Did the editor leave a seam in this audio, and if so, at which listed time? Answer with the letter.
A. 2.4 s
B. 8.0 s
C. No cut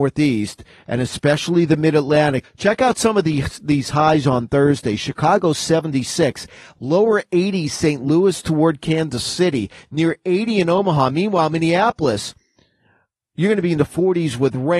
A